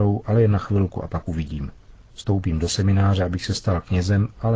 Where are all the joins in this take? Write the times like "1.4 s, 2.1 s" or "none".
none